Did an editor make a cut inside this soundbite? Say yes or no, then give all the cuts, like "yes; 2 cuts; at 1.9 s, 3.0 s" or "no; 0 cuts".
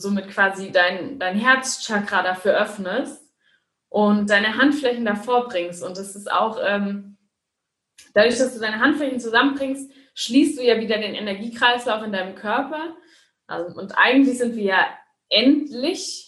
no; 0 cuts